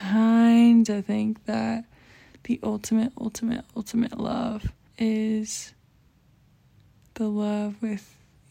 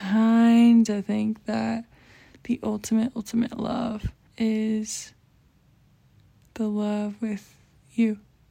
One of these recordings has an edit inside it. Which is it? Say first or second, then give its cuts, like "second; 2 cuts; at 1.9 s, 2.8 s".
second; 1 cut; at 3.1 s